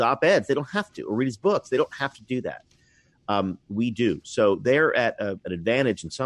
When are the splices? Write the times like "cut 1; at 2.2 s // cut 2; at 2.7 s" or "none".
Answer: none